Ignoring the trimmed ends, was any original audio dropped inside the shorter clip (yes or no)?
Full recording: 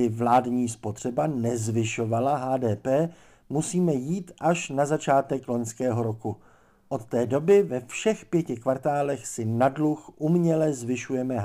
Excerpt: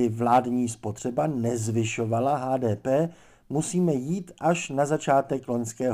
no